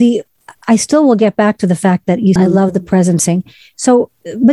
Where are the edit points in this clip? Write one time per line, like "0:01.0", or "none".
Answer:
0:02.4